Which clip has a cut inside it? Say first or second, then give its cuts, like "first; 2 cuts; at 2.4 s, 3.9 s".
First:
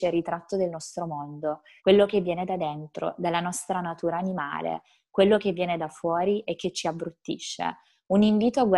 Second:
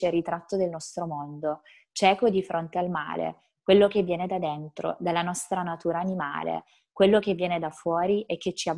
first; 1 cut; at 1.8 s